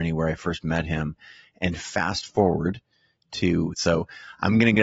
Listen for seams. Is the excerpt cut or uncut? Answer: cut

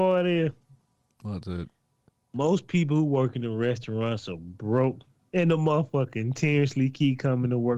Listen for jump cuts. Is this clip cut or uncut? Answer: uncut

